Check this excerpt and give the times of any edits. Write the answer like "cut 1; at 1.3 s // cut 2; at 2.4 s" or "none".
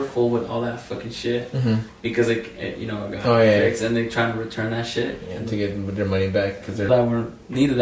cut 1; at 6.9 s